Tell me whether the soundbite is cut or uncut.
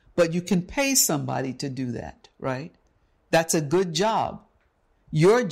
uncut